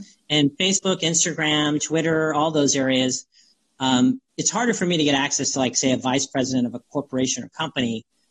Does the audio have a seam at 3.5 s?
no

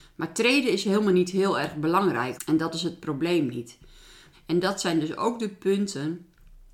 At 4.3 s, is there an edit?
yes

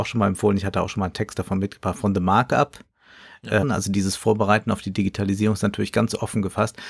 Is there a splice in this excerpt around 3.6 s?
yes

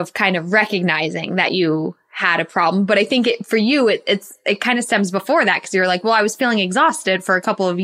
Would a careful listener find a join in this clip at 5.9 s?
no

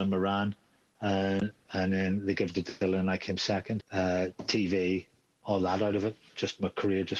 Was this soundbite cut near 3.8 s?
yes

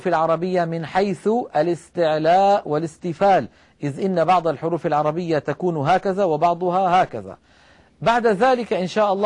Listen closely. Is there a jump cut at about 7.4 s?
no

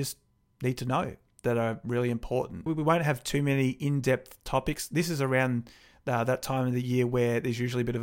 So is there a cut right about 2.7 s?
yes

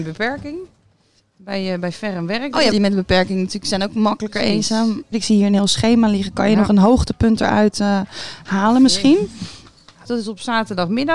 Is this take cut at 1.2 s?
no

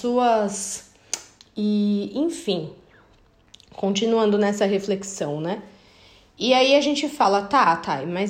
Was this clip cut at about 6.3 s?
no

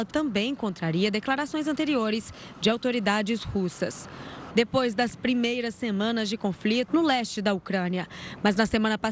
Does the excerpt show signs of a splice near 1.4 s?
no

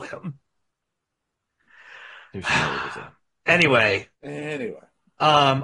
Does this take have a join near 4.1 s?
yes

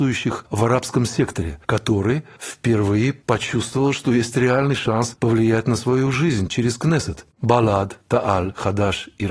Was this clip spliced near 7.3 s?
no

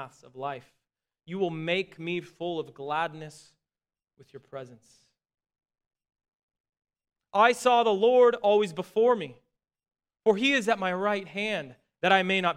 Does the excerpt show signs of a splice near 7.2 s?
yes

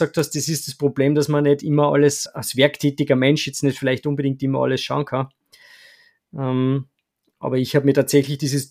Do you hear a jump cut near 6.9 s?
no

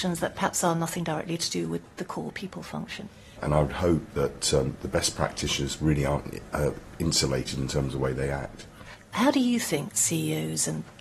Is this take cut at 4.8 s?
no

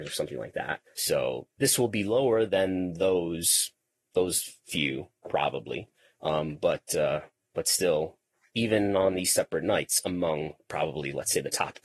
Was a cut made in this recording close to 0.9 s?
yes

